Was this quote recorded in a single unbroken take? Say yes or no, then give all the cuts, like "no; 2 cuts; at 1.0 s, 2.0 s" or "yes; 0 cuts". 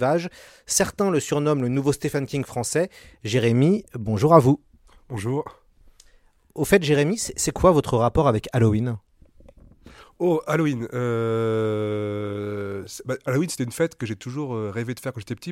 yes; 0 cuts